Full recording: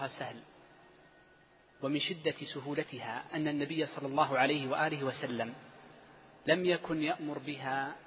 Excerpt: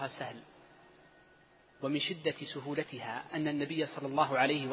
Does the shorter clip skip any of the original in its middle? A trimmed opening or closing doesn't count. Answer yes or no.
no